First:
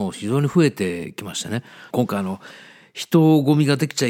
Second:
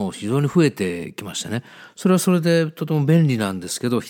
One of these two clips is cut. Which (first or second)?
first